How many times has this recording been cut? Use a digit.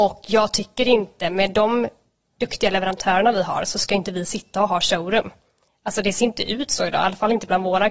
0